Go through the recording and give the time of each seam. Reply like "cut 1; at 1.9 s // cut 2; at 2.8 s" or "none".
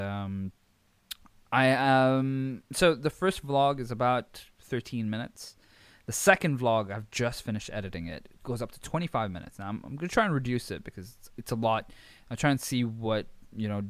none